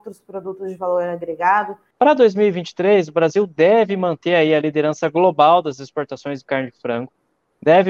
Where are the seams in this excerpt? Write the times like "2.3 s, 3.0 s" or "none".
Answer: 1.9 s